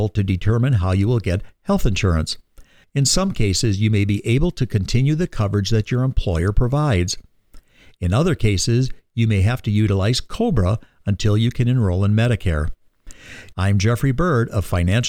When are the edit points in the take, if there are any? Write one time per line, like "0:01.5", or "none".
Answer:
0:02.8
0:13.5